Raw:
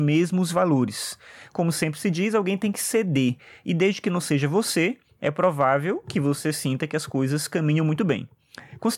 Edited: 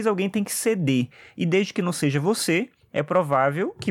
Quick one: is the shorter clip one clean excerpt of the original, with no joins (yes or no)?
yes